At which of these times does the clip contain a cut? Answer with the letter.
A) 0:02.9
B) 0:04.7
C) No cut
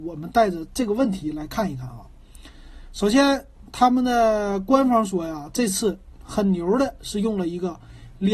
C